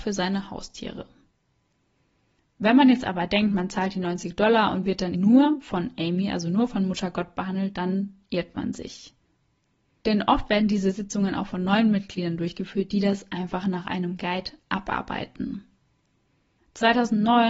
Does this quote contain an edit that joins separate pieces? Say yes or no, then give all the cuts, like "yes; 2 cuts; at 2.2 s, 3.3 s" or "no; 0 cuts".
yes; 1 cut; at 5.1 s